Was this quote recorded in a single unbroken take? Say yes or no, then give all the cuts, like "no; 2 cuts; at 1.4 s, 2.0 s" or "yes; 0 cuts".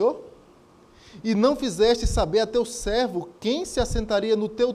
yes; 0 cuts